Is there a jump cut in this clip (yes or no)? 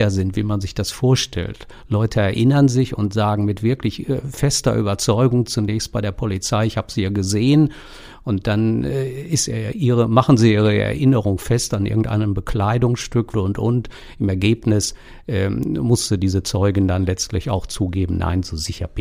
yes